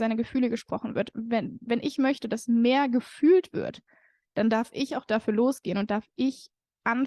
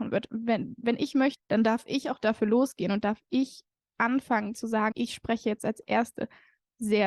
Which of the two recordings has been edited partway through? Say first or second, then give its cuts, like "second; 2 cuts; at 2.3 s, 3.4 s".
second; 2 cuts; at 1.4 s, 4.9 s